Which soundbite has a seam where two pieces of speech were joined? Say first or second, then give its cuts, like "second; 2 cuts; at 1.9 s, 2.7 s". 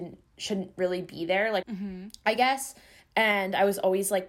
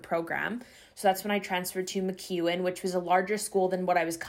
first; 1 cut; at 1.6 s